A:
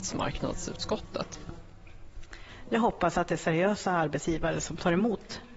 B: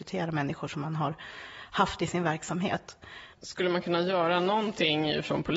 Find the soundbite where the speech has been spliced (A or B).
B